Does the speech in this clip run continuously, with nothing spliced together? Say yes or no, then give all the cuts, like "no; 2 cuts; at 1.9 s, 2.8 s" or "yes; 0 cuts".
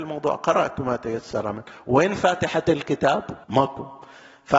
no; 1 cut; at 3.4 s